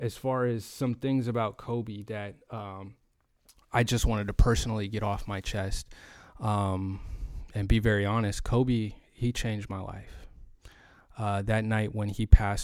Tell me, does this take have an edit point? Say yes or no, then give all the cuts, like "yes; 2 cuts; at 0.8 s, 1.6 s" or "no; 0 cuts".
no; 0 cuts